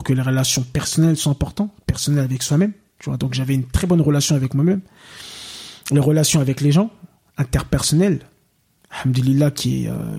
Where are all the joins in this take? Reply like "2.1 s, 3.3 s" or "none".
none